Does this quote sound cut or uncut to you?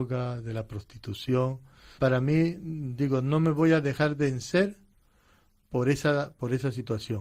cut